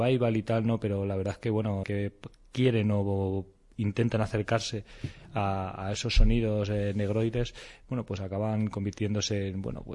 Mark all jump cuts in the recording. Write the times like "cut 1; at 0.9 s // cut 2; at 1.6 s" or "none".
cut 1; at 1.8 s